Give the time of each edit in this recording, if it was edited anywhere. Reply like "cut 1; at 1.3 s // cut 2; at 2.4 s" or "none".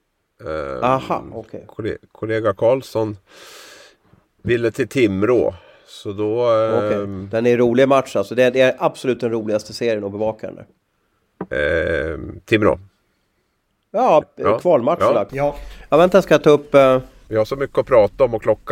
cut 1; at 14.2 s // cut 2; at 15.3 s // cut 3; at 17.3 s